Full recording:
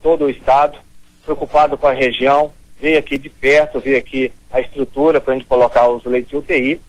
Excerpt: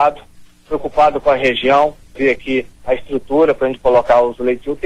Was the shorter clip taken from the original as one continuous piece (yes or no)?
no